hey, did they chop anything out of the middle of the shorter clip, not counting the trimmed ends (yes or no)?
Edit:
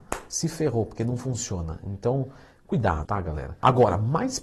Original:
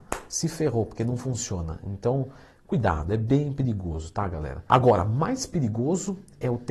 yes